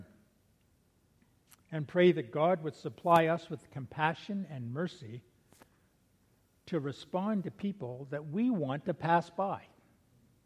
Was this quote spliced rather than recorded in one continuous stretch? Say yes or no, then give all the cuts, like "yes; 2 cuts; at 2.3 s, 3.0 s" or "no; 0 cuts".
no; 0 cuts